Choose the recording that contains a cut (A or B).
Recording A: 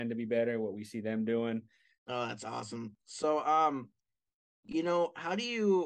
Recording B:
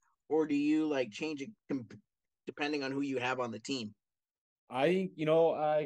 A